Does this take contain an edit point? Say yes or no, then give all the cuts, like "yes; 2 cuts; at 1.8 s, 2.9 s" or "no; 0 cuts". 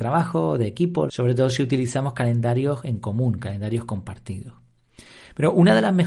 yes; 1 cut; at 1.1 s